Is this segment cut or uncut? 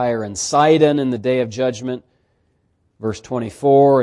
uncut